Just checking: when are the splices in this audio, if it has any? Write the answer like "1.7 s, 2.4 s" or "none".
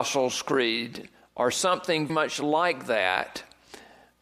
2.1 s